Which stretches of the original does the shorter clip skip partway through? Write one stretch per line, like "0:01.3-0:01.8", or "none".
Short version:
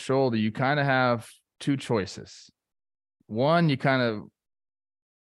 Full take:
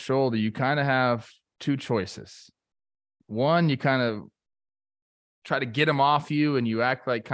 none